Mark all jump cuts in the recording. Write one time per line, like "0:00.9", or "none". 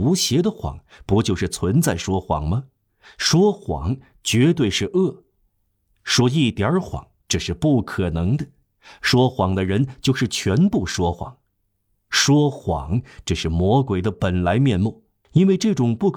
0:15.2